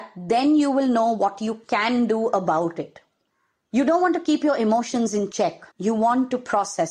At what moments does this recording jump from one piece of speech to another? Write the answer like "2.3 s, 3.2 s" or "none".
5.7 s